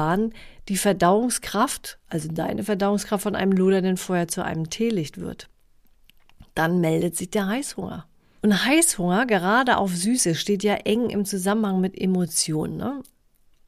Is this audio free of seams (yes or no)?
no